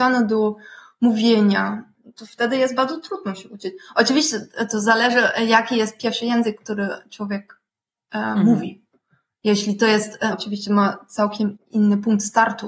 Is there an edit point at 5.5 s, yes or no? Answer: no